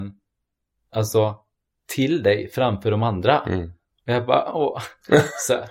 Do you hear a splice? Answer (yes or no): no